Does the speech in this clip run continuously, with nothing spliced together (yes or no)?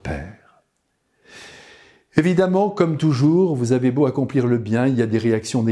yes